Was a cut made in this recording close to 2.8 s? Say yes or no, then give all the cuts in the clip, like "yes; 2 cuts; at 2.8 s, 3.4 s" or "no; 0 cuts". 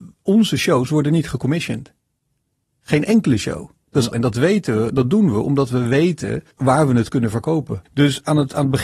no; 3 cuts; at 4.1 s, 6.5 s, 7.9 s